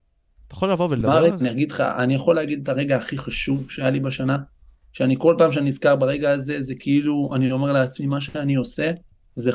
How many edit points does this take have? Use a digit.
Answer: 1